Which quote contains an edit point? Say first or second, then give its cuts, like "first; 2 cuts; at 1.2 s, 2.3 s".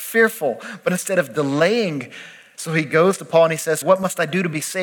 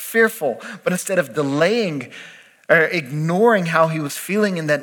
first; 2 cuts; at 2.5 s, 3.8 s